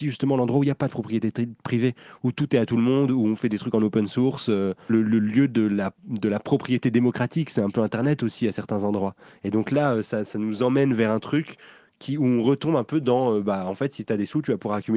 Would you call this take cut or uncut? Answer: uncut